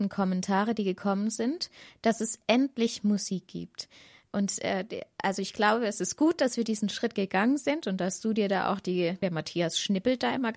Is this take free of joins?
no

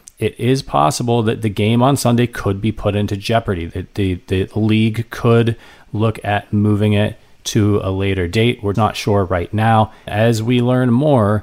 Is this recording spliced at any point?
yes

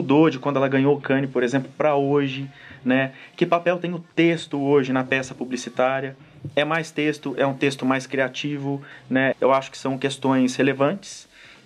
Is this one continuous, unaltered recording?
no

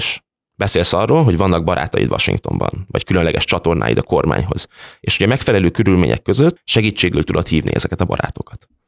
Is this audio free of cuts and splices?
no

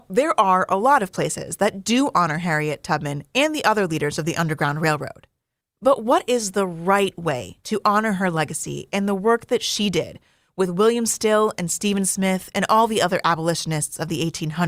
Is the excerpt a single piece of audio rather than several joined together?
no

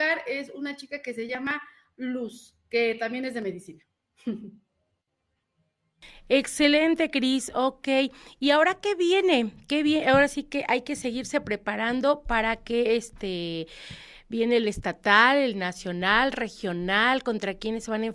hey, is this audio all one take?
yes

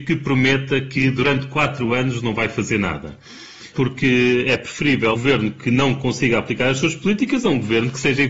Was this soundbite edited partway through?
yes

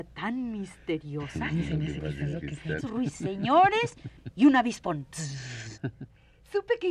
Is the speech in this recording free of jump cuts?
no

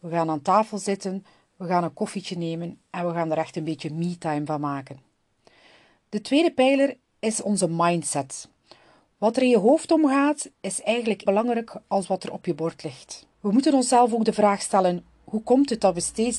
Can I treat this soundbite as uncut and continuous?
no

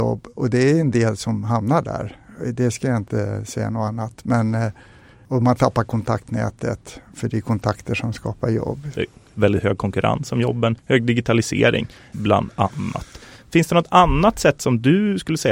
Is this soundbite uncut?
no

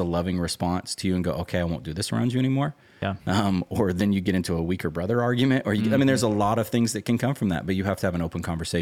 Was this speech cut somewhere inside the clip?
no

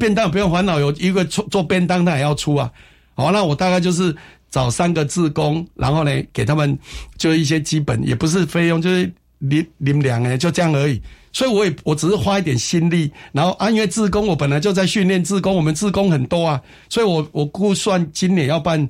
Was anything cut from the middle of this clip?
no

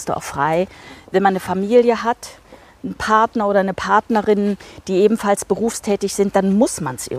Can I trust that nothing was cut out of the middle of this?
yes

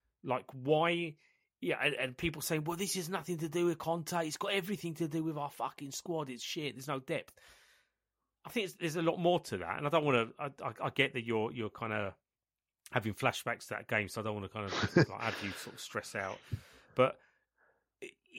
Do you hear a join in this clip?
no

